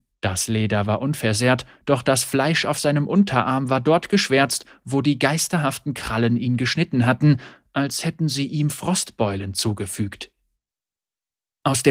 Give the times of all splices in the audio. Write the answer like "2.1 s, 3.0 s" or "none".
none

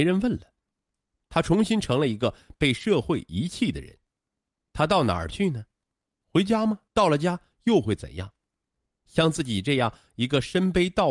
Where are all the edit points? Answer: 6.9 s

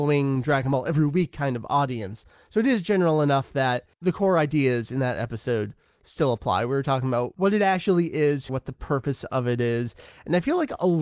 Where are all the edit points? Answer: 8.5 s

